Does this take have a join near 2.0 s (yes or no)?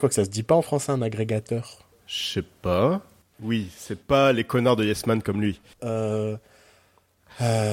no